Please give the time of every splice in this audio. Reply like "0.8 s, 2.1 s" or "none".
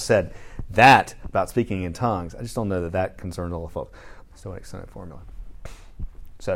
4.2 s